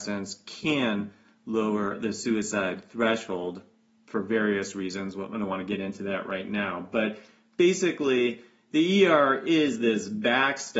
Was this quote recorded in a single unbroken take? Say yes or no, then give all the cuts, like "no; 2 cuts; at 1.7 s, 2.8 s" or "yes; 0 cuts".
yes; 0 cuts